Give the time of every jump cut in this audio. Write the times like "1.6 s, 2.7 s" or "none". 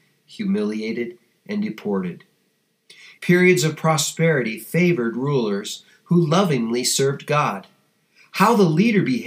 3.2 s